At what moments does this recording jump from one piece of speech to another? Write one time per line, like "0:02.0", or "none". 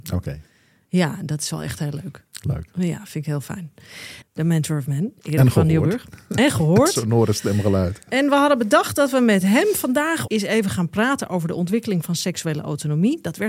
0:04.2
0:10.3